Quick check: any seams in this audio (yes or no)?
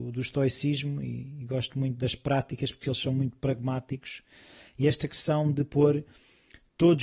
no